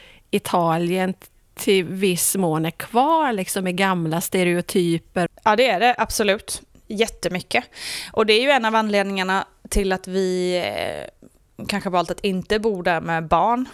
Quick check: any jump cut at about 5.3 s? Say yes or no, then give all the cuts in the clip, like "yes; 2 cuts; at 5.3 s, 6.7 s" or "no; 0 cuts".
yes; 1 cut; at 5.3 s